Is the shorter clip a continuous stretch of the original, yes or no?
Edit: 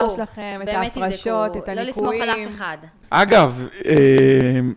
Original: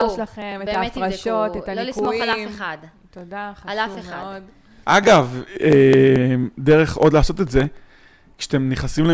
no